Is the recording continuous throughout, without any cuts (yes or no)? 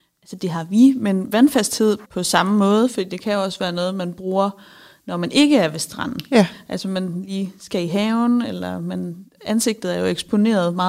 no